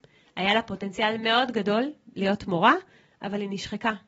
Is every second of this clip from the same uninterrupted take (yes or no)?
yes